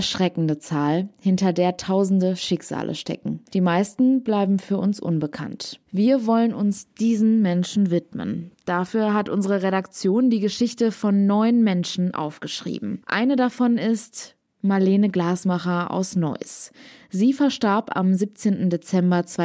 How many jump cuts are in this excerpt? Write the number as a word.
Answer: zero